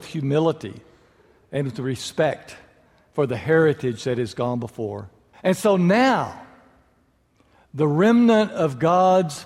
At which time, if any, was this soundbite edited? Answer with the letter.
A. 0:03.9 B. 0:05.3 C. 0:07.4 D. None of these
B